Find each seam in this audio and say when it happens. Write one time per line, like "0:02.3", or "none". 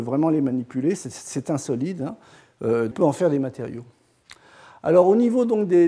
0:02.9